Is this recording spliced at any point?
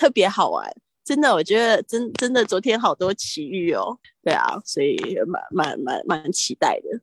yes; 1 cut; at 4.0 s

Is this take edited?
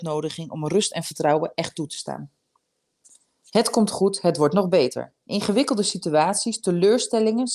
no; 0 cuts

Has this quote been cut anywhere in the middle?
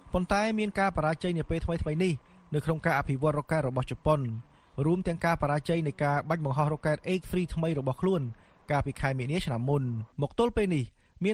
yes; 1 cut; at 10.1 s

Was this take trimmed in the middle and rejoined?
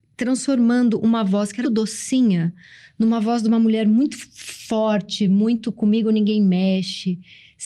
yes; 1 cut; at 1.6 s

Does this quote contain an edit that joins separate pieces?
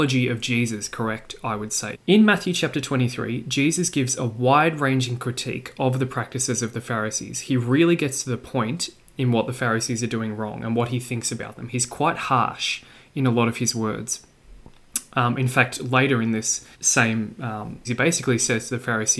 yes; 3 cuts; at 1.9 s, 16.7 s, 17.8 s

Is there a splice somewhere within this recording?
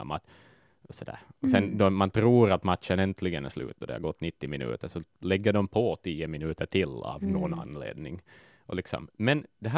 no; 0 cuts

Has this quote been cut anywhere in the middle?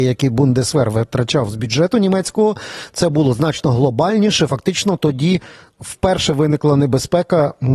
no; 0 cuts

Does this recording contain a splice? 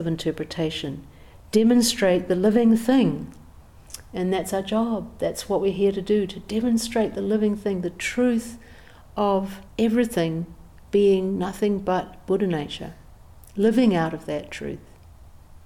yes; 1 cut; at 9.7 s

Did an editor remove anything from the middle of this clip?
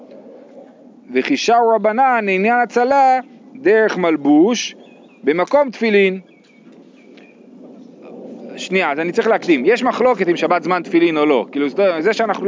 no; 0 cuts

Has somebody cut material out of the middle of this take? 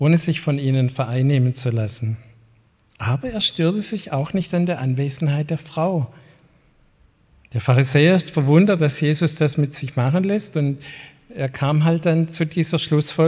no; 0 cuts

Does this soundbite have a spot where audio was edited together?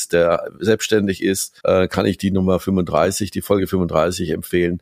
yes; 1 cut; at 1.6 s

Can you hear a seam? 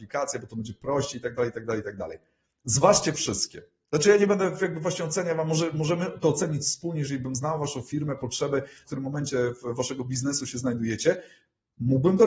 yes; 1 cut; at 8.8 s

